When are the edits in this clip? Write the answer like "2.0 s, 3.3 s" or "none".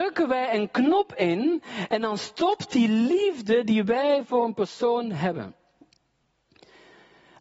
none